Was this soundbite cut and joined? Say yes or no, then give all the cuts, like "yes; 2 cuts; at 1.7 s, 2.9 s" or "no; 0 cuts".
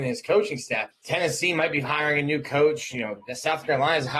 yes; 1 cut; at 0.9 s